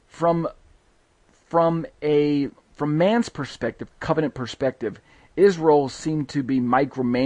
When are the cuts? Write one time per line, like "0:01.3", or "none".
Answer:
0:02.6
0:03.9